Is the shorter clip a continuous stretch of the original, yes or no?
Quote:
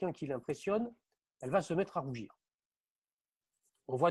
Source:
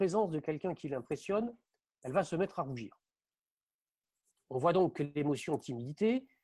yes